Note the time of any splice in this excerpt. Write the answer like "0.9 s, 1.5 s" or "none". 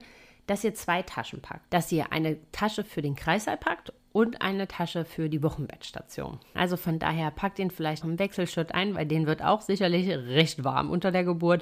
6.5 s, 8.0 s